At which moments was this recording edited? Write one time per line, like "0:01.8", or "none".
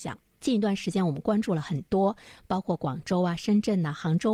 none